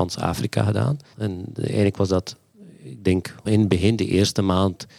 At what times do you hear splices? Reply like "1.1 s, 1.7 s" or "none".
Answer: 1.1 s, 3.5 s